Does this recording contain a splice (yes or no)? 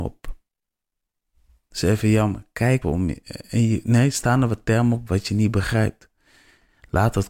yes